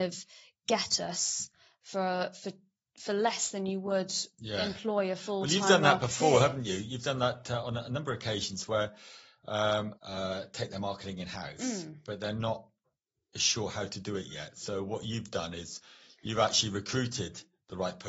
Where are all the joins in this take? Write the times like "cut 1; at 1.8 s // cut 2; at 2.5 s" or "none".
cut 1; at 9.9 s